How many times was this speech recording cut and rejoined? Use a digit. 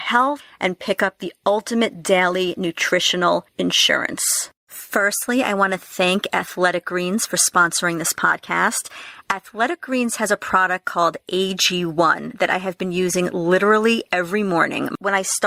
1